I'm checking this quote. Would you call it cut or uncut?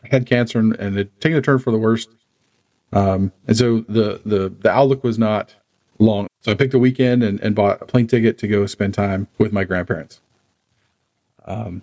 cut